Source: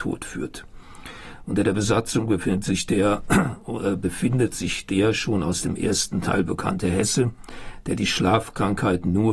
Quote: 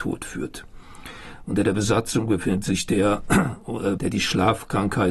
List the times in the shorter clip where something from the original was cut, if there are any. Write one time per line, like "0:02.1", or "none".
0:04.0